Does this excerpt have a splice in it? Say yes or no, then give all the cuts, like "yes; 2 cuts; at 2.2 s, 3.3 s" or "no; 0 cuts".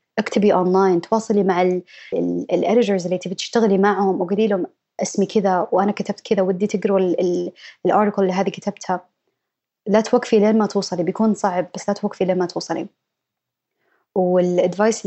yes; 1 cut; at 2.1 s